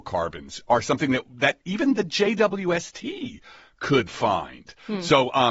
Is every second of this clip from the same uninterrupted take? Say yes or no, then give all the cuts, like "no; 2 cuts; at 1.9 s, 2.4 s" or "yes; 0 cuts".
yes; 0 cuts